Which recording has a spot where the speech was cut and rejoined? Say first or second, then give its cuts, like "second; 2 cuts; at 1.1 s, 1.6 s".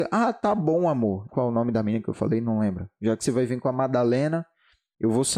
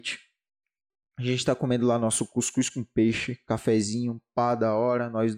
first; 1 cut; at 1.3 s